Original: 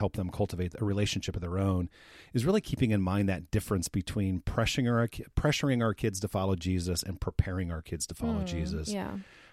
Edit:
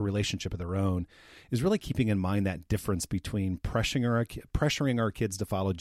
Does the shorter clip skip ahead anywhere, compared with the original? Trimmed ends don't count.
no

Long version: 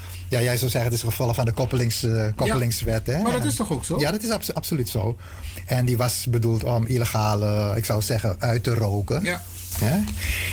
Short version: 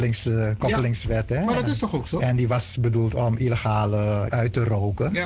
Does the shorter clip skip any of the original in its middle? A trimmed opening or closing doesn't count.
yes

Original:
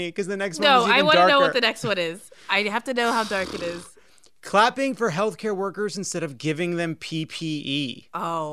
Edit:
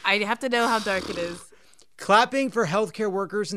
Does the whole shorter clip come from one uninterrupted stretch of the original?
yes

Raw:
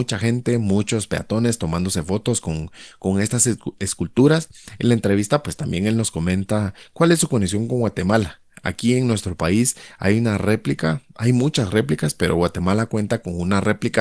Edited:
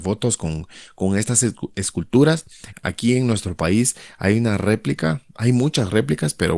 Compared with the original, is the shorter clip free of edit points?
no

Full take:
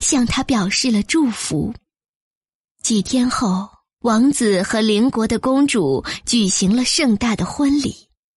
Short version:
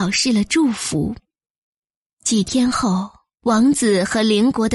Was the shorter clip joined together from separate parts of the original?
no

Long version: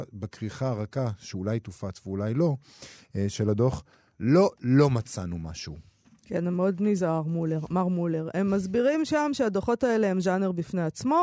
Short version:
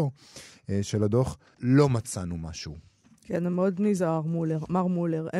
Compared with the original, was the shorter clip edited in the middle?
yes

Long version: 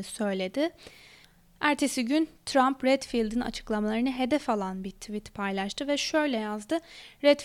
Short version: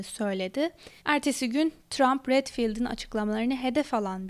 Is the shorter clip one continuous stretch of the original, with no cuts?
no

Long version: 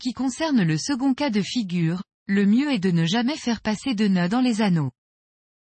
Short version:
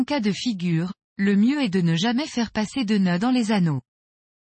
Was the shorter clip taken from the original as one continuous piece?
yes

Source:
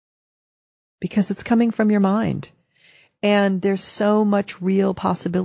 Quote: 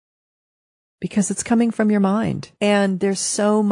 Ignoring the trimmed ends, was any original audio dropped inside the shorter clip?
yes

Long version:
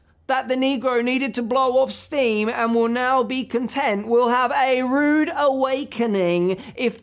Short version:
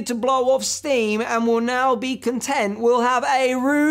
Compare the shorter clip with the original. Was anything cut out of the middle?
no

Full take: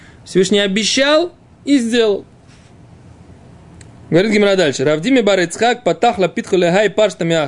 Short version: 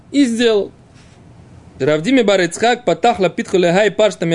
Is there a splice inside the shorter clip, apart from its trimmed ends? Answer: yes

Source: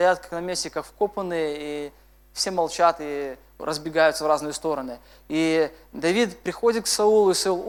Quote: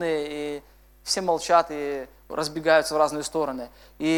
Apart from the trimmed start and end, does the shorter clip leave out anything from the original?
no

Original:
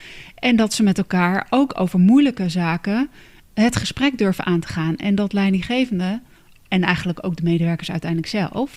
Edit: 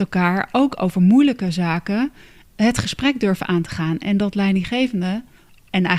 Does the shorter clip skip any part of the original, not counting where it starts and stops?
no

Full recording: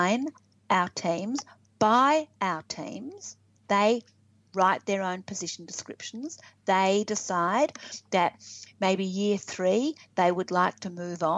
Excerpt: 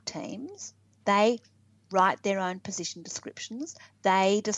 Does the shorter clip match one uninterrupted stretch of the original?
yes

